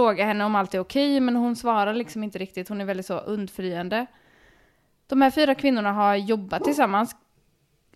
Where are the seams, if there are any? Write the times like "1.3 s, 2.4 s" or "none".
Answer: none